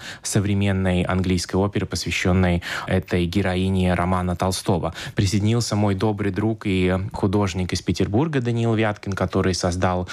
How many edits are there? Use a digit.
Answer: 1